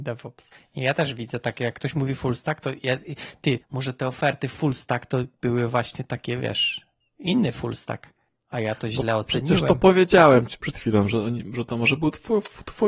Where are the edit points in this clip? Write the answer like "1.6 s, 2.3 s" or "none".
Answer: 3.6 s